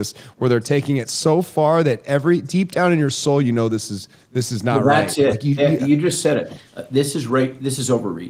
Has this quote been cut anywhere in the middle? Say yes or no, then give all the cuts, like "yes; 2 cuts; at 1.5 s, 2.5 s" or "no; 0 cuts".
no; 0 cuts